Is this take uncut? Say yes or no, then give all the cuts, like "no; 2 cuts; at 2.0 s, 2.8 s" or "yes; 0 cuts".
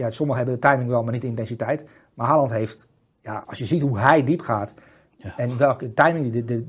no; 1 cut; at 3.4 s